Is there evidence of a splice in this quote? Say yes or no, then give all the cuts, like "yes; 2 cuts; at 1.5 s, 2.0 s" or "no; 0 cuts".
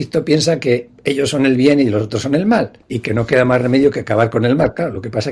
yes; 1 cut; at 2.8 s